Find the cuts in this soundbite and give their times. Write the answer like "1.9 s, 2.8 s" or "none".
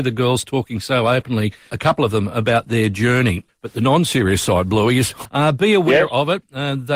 1.7 s, 3.5 s, 5.2 s